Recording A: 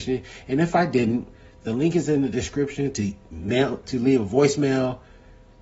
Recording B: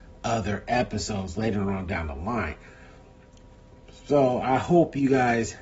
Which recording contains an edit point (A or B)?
A